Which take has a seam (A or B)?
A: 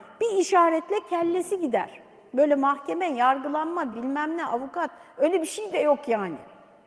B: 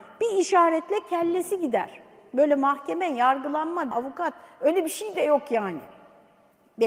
B